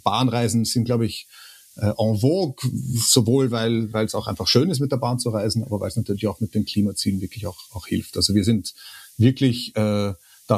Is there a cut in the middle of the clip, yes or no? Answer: no